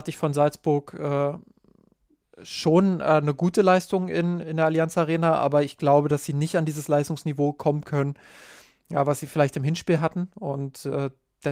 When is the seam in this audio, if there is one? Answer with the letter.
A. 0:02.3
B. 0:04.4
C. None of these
B